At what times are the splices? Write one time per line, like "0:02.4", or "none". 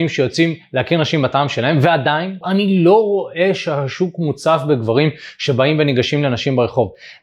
0:02.4